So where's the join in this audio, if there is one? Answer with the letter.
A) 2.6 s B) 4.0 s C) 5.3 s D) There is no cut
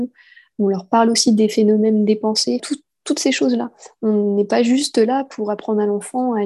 A